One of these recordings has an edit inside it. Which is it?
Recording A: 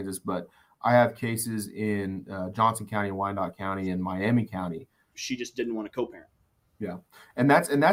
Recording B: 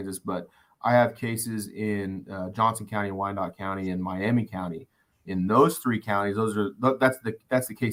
A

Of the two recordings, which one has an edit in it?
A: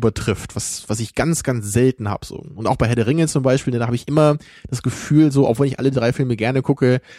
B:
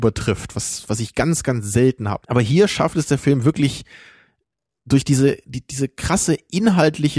B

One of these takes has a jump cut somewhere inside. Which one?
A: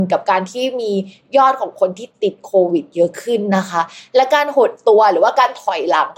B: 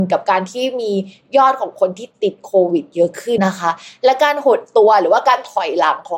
B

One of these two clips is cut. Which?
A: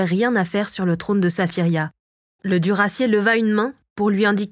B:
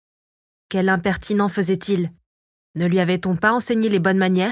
A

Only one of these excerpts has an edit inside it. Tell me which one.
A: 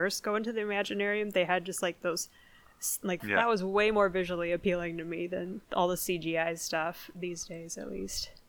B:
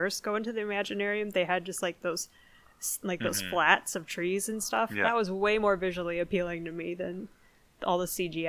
A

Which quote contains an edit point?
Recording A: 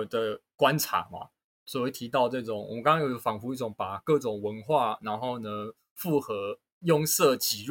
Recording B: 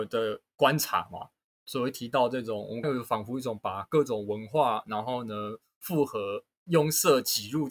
B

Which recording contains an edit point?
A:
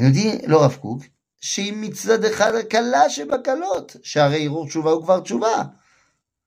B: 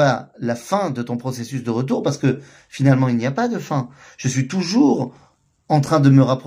A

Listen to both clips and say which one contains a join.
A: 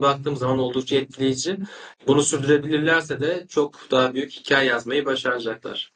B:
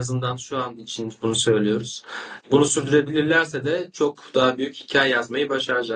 B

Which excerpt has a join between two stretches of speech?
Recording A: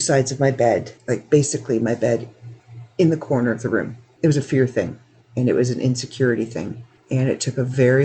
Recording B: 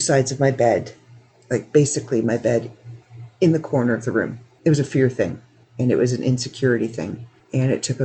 A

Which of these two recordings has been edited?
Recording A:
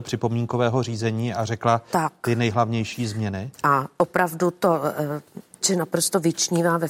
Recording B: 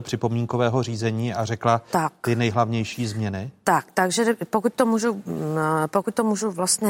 A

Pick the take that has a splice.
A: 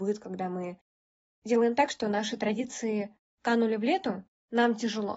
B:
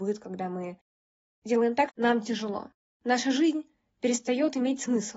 B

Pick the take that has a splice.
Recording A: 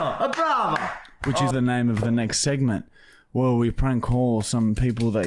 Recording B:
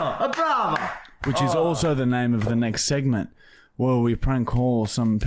A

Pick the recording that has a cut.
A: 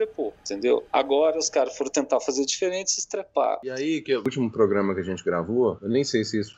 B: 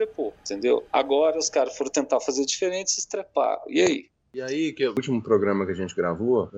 A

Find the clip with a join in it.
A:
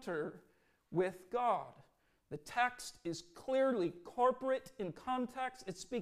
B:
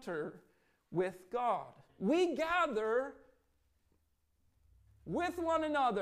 B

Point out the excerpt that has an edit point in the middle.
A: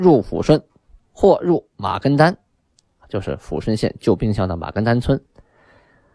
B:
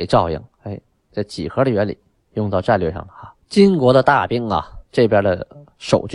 B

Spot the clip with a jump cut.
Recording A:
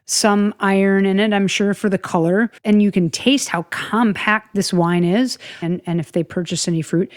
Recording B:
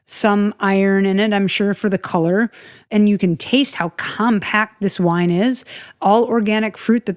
A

